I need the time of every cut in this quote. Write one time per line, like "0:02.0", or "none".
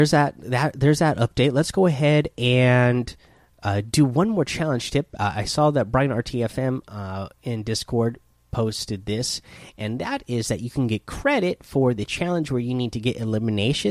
none